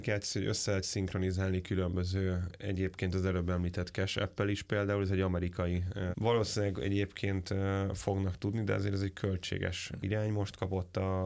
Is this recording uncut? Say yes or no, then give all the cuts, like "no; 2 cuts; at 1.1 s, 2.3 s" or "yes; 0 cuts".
no; 1 cut; at 6.1 s